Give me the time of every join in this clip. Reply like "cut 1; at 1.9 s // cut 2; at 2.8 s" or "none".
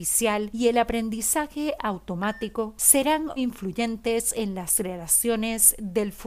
cut 1; at 3.4 s